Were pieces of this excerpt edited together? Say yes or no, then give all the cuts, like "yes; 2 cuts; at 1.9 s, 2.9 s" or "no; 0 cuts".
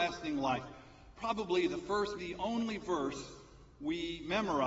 yes; 1 cut; at 2.2 s